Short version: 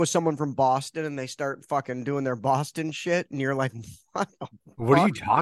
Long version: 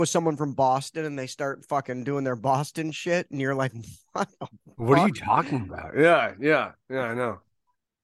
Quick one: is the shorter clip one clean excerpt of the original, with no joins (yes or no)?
yes